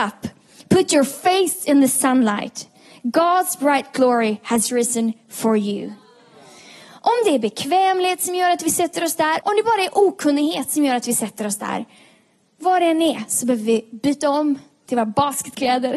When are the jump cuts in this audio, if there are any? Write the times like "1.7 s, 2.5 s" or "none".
9.4 s